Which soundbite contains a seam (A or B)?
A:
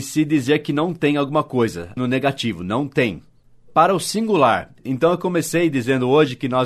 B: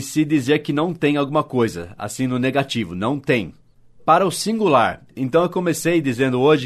A